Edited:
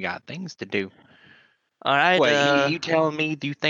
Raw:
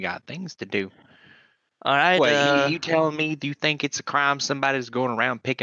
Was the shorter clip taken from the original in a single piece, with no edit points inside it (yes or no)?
yes